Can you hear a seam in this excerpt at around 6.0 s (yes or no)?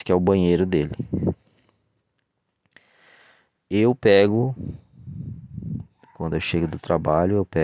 no